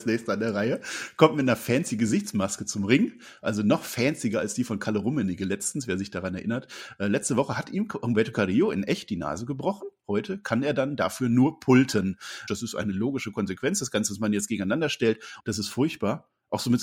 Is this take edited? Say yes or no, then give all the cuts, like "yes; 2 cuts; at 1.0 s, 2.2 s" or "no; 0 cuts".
yes; 2 cuts; at 12.5 s, 15.4 s